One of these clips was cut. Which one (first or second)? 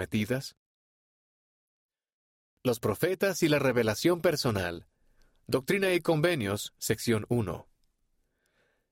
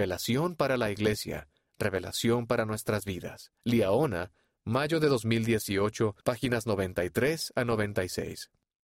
second